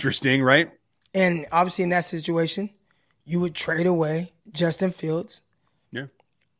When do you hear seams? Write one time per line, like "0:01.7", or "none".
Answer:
0:01.0
0:04.4